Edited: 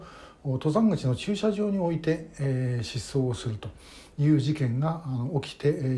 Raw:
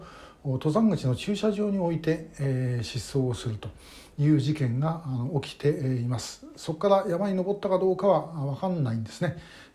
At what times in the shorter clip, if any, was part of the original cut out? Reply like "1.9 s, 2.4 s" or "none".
none